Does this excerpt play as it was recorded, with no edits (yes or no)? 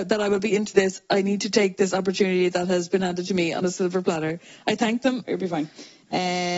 no